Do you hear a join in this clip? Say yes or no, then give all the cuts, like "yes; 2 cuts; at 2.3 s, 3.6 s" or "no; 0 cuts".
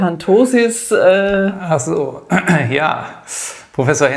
no; 0 cuts